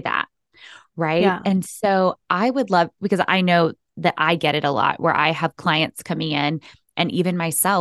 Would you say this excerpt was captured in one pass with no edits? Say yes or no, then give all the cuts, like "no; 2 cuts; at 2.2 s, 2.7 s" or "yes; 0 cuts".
yes; 0 cuts